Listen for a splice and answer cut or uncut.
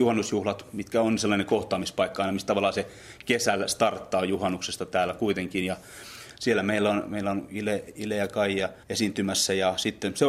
cut